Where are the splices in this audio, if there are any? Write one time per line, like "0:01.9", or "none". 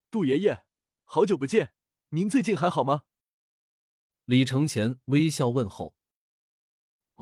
none